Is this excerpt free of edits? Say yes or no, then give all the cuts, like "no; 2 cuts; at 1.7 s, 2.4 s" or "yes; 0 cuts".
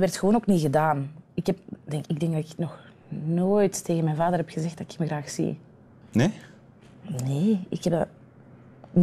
no; 1 cut; at 2.0 s